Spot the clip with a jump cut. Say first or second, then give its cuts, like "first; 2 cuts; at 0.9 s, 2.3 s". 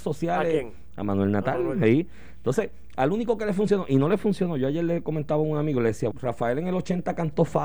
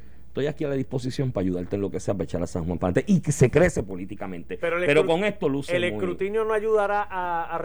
first; 1 cut; at 6.1 s